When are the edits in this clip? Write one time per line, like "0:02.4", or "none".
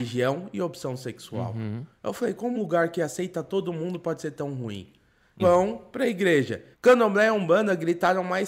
0:02.5
0:05.4
0:06.7